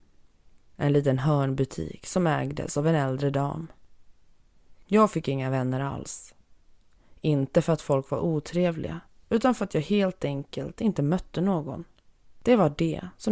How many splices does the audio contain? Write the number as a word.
zero